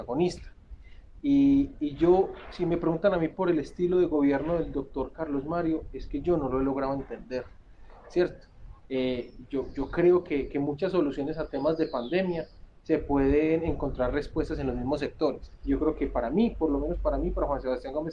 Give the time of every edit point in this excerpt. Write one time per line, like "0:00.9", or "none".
0:08.8
0:15.6